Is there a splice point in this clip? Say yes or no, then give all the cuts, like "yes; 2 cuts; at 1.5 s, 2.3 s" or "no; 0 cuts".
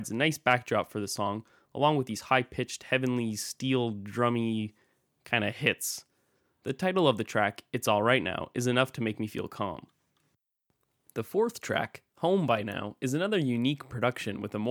no; 0 cuts